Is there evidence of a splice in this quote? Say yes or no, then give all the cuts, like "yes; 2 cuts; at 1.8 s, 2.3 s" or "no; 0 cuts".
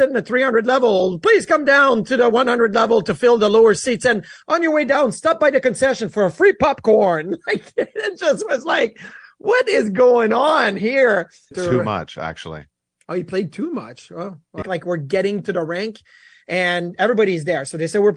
yes; 2 cuts; at 11.5 s, 14.6 s